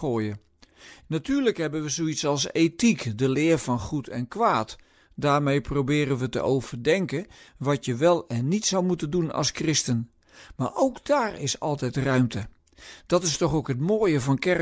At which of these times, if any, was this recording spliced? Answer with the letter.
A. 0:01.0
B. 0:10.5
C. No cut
A